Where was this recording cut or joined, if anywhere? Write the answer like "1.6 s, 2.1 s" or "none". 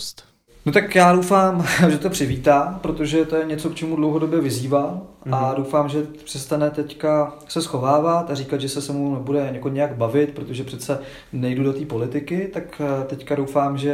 none